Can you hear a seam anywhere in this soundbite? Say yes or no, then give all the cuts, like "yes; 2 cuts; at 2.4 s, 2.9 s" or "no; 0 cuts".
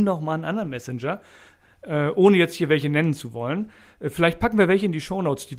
no; 0 cuts